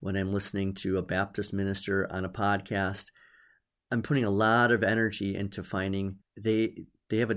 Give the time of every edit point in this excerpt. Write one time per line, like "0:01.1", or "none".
0:06.2